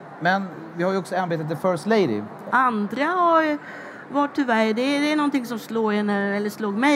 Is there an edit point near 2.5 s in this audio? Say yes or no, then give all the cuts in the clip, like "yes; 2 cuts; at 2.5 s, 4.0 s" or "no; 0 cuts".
yes; 1 cut; at 2.5 s